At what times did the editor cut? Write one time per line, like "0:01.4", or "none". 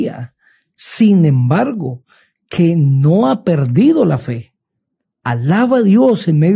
0:05.2